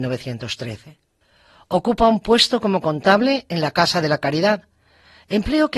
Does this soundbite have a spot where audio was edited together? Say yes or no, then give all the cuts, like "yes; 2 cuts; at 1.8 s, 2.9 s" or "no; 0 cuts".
no; 0 cuts